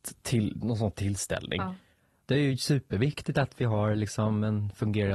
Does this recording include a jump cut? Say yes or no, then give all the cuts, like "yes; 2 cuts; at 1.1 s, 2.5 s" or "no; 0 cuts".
yes; 1 cut; at 2.3 s